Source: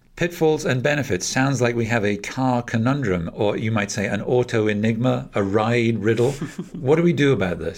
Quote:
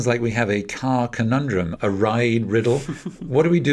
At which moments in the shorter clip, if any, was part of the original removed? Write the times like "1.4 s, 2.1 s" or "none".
1.8 s